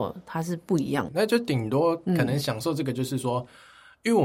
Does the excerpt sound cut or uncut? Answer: cut